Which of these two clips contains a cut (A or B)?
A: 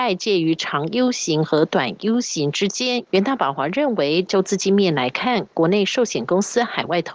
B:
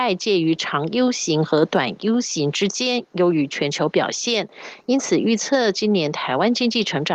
A